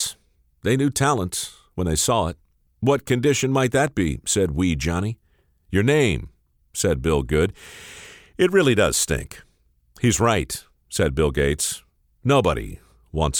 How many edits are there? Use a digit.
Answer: 1